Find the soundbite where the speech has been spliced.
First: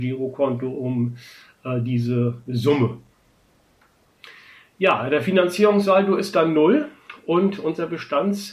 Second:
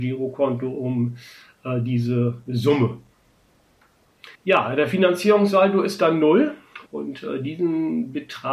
second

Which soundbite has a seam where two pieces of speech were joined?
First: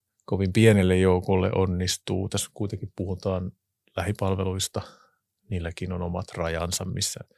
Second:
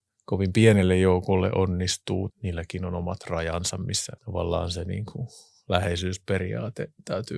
second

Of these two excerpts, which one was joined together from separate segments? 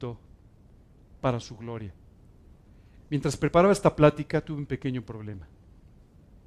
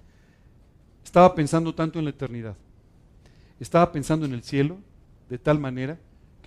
first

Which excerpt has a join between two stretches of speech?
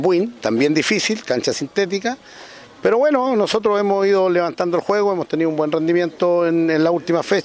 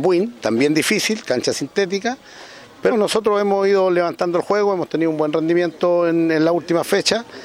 second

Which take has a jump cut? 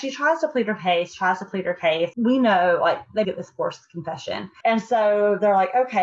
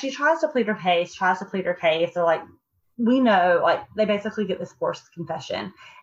first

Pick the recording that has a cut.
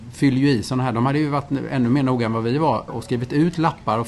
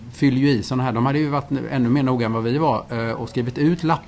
first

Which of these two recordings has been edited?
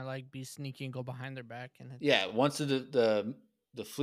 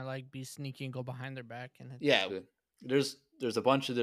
second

